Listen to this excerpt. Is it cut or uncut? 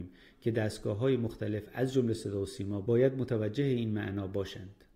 uncut